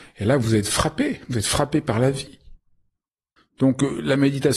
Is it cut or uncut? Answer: cut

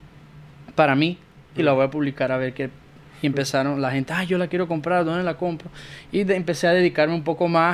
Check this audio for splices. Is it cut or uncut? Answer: uncut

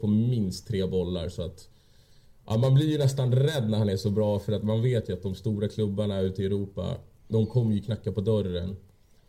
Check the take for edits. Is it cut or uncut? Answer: uncut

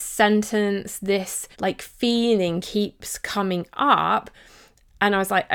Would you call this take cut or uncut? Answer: cut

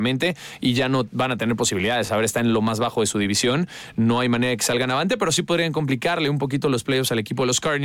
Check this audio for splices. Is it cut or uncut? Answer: uncut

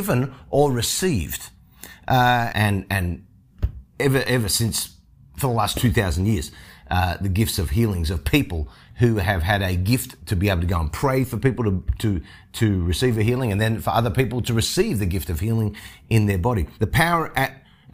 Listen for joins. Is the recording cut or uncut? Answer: cut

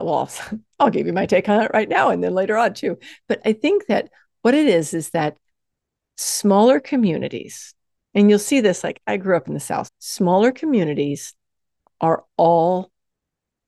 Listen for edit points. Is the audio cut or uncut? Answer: cut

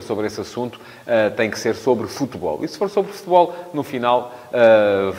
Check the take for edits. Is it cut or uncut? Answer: uncut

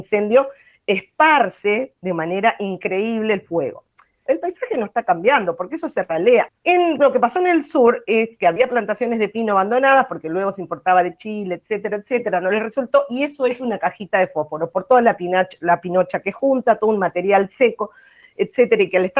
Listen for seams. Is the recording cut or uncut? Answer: cut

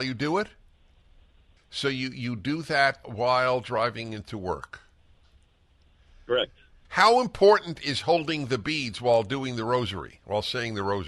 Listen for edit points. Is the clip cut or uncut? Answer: cut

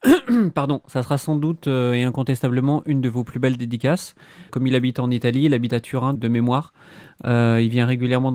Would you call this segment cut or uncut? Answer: cut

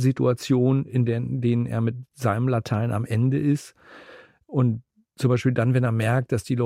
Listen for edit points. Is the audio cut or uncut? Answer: uncut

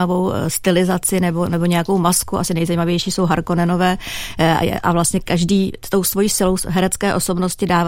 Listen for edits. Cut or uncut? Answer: uncut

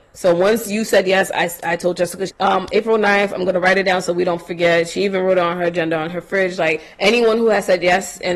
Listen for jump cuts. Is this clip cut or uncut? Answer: cut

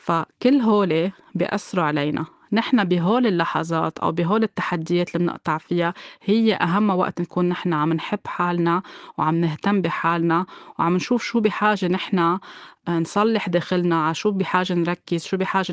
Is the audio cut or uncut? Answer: uncut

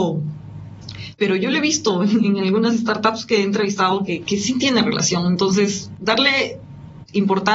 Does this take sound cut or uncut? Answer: cut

